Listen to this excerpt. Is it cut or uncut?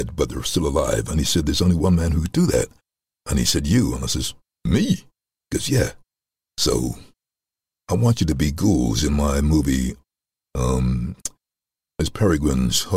uncut